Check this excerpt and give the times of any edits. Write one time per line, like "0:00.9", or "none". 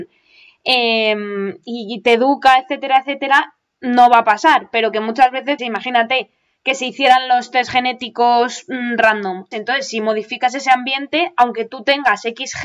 0:05.6
0:09.5